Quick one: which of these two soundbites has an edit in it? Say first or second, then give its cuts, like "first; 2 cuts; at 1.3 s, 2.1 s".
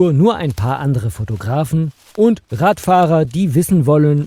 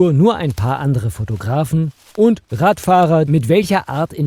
second; 1 cut; at 3.3 s